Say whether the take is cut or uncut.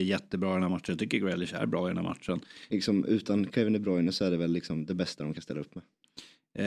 cut